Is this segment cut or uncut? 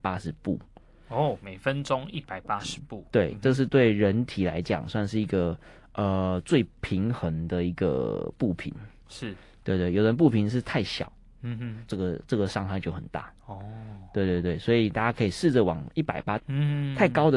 cut